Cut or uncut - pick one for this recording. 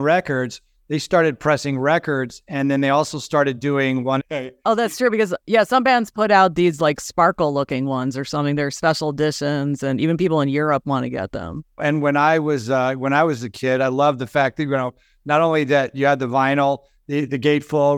cut